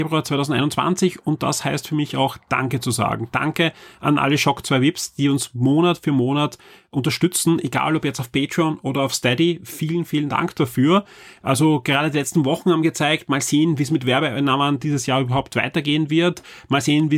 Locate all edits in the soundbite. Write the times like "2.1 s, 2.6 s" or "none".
none

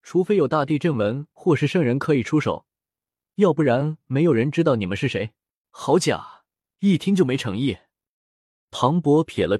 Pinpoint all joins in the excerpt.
5.6 s

